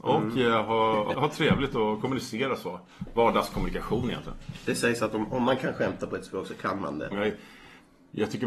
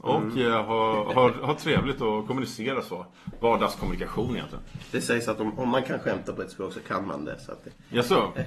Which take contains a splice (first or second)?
first